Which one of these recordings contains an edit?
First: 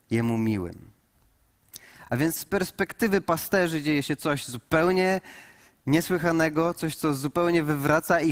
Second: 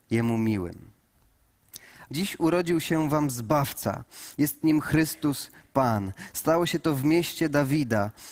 second; 1 cut; at 2.1 s

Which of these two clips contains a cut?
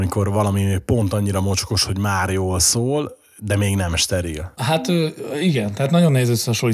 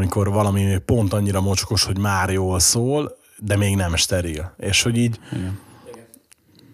first; 1 cut; at 4.6 s

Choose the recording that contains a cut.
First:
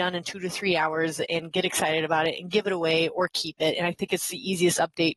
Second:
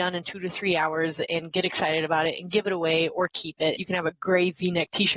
second; 1 cut; at 3.8 s

